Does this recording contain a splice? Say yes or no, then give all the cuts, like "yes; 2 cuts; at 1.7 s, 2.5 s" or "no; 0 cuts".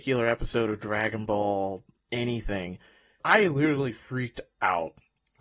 yes; 1 cut; at 3.2 s